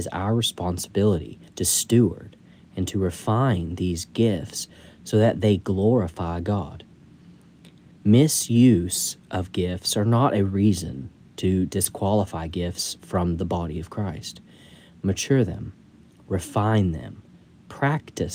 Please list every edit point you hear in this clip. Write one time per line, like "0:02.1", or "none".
0:01.5